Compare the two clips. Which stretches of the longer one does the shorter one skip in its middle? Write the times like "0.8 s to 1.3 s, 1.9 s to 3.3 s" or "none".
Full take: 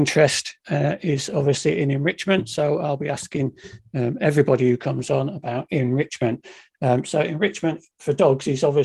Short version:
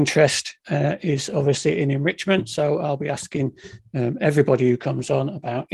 none